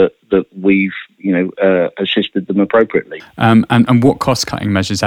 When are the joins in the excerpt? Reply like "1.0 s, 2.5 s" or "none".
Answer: 3.2 s